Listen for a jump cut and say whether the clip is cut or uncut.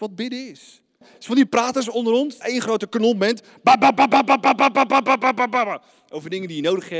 cut